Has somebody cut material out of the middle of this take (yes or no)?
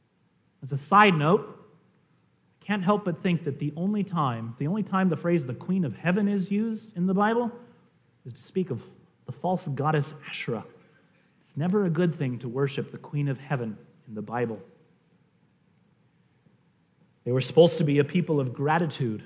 yes